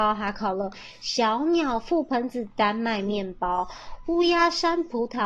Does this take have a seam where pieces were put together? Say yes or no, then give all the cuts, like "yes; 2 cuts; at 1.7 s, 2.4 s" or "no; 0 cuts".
no; 0 cuts